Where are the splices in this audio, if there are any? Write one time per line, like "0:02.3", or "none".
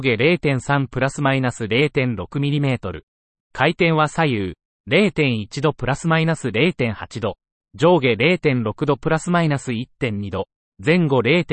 0:03.4